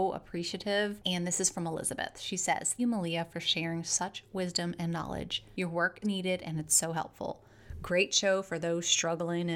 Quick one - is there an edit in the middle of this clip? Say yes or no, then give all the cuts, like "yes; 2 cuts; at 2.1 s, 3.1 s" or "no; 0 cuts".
yes; 2 cuts; at 2.8 s, 6.0 s